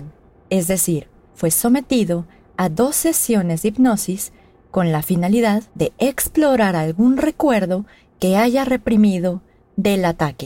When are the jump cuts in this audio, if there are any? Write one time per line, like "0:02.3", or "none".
0:01.3
0:05.7